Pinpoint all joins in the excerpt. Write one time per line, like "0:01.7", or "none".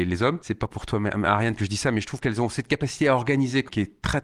none